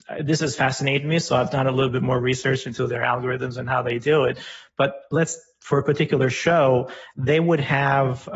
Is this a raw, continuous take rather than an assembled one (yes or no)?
yes